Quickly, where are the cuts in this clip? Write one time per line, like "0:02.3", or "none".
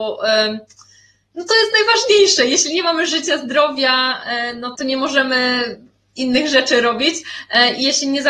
0:04.8